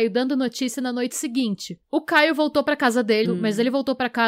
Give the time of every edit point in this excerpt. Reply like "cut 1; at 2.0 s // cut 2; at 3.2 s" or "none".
cut 1; at 1.8 s // cut 2; at 3.2 s